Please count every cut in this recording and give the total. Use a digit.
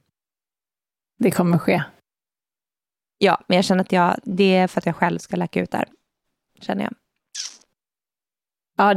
0